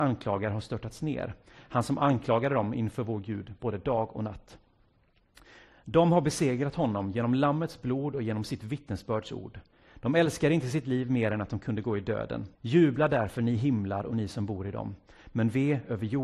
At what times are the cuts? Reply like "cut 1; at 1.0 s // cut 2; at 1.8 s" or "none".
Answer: cut 1; at 12.5 s

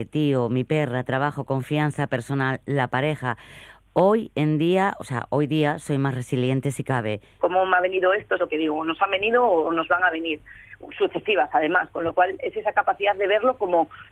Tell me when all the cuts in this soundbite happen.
cut 1; at 7.4 s // cut 2; at 8.4 s

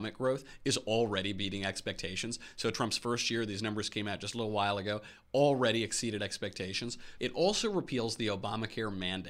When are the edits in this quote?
cut 1; at 7.2 s

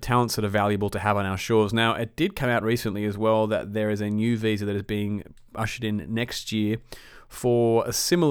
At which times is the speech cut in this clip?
none

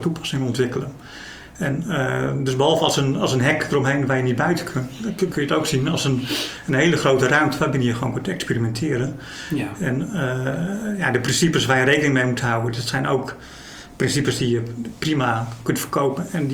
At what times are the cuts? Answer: none

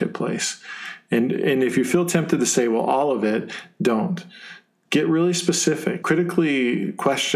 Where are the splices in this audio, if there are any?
cut 1; at 6.0 s

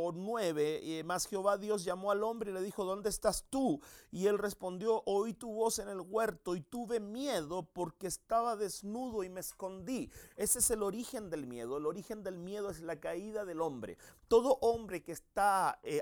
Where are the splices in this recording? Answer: none

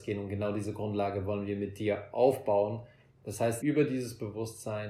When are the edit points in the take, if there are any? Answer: cut 1; at 3.6 s

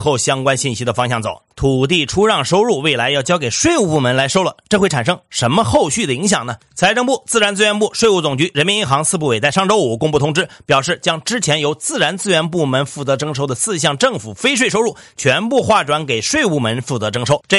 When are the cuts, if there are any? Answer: cut 1; at 1.5 s

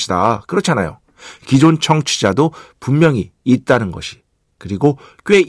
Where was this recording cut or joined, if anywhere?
none

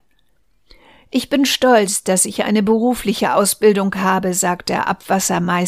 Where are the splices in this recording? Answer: none

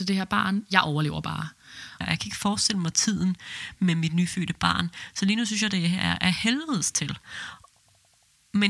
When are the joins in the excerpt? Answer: cut 1; at 2.0 s

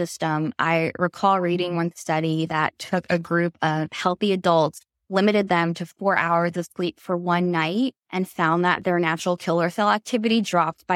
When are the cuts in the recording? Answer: none

